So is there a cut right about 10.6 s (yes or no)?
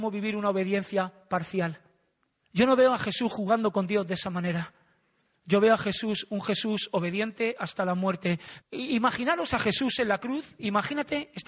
no